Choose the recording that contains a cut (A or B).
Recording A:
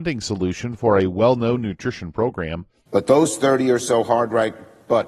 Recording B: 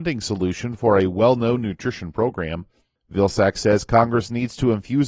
A